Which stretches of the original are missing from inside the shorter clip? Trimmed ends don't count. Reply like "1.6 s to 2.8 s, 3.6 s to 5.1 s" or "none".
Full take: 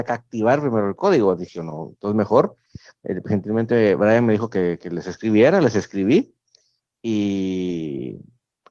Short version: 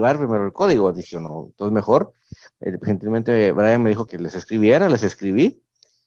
4.5 s to 4.8 s